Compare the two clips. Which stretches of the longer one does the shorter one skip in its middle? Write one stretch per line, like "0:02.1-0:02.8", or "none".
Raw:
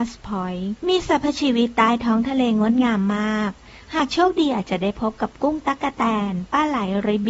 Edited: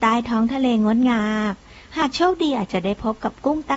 0:02.9-0:03.2